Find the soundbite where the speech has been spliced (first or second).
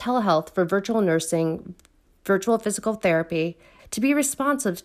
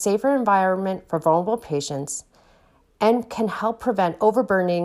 first